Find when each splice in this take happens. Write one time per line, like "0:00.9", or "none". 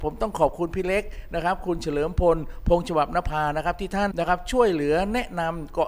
0:04.1